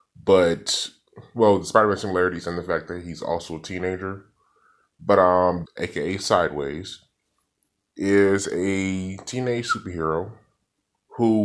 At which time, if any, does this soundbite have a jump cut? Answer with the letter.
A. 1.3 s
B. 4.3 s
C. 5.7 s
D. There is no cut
C